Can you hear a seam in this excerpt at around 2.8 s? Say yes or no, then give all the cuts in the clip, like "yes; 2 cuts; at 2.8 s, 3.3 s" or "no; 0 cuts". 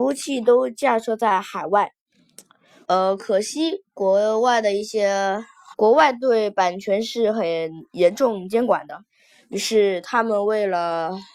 yes; 2 cuts; at 2.8 s, 5.7 s